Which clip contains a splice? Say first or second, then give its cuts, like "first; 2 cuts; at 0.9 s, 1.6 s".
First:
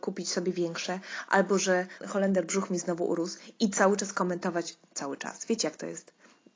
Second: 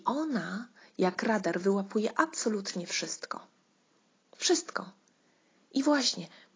first; 1 cut; at 2.0 s